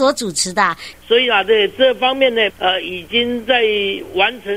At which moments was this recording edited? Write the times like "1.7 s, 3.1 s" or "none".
0.9 s, 2.5 s